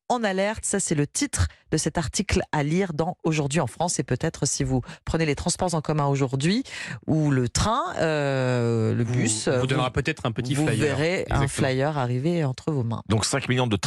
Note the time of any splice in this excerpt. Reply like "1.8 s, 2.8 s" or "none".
none